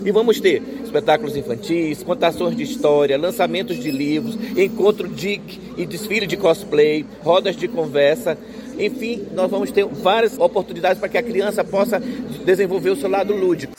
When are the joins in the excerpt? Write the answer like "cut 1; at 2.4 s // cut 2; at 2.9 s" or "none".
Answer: cut 1; at 2.0 s // cut 2; at 8.7 s // cut 3; at 10.4 s